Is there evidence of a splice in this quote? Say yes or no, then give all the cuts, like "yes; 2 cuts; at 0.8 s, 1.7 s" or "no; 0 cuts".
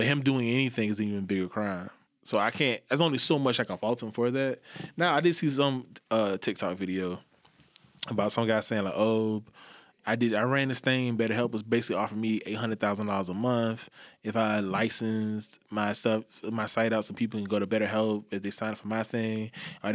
no; 0 cuts